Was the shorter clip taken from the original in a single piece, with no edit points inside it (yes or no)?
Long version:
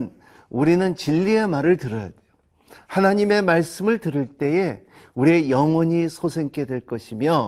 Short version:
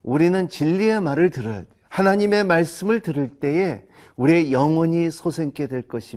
no